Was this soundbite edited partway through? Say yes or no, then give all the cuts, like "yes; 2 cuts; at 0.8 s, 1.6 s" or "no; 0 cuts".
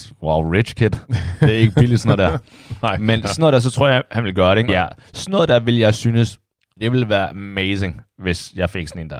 yes; 1 cut; at 4.7 s